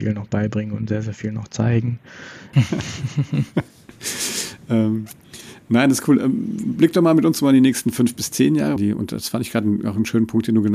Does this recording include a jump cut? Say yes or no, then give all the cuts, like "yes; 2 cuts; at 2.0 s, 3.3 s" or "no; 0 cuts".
yes; 2 cuts; at 2.5 s, 8.8 s